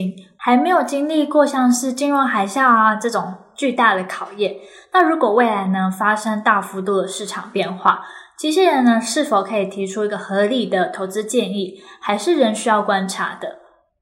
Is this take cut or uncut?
uncut